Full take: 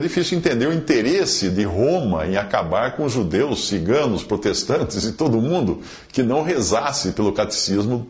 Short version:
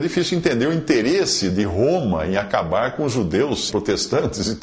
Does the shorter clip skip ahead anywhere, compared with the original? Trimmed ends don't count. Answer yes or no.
yes